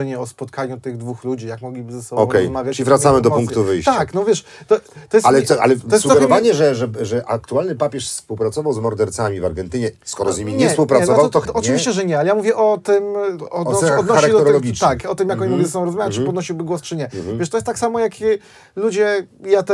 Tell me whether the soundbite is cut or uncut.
cut